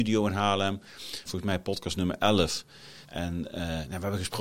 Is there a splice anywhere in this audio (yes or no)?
yes